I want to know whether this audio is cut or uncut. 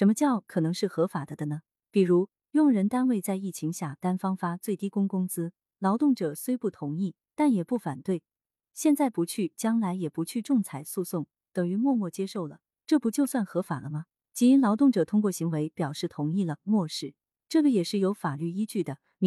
uncut